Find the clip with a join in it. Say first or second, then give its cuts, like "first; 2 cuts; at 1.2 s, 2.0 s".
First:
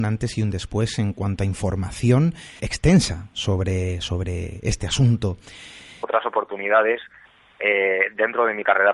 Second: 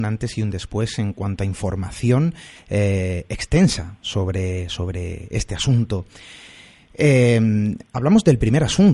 first; 2 cuts; at 2.6 s, 6.0 s